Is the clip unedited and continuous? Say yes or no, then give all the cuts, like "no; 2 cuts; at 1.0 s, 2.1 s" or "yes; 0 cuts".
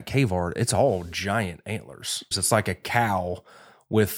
no; 1 cut; at 2.3 s